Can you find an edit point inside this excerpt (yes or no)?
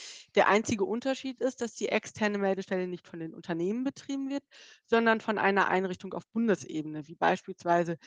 no